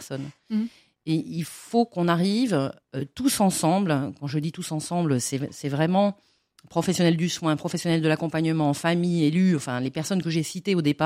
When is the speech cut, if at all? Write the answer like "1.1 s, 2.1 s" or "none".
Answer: none